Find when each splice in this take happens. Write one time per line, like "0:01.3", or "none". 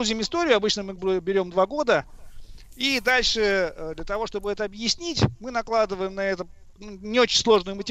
none

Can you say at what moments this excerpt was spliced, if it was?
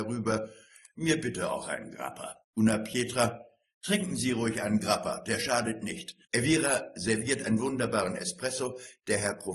0:02.4
0:06.2

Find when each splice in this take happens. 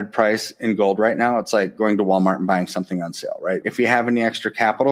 0:03.6

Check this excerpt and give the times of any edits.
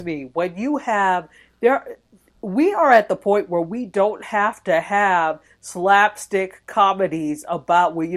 none

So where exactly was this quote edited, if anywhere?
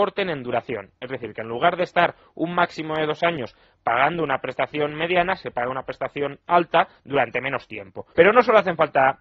0:08.1

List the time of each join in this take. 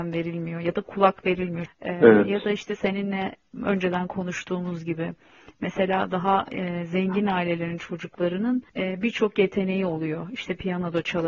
0:01.7
0:08.7

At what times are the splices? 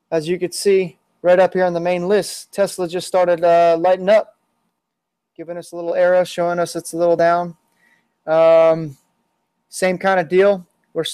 none

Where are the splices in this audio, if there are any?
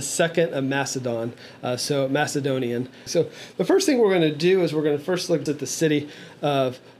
0:03.1
0:05.5

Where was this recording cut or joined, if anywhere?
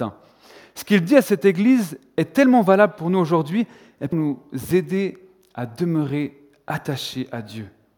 0:04.1

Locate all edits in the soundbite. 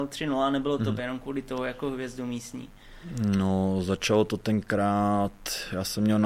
0:01.0

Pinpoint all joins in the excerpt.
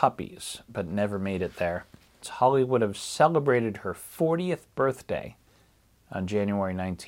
0:02.2

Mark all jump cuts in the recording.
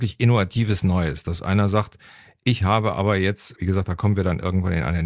0:03.5

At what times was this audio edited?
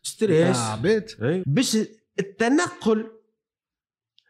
0:01.4

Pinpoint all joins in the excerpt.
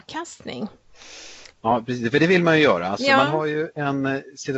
0:01.5

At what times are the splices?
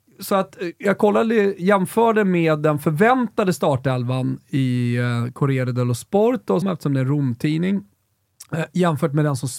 0:06.6

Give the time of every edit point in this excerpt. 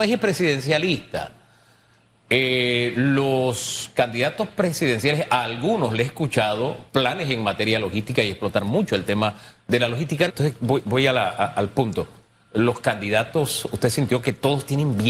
0:10.3

